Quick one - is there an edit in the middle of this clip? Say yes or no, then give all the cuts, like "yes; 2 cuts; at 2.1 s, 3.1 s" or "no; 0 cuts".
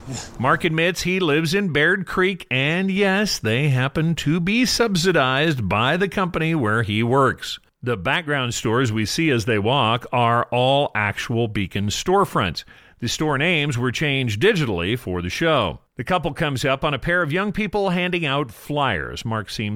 no; 0 cuts